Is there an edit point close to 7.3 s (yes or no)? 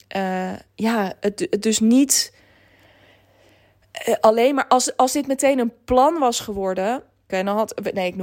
yes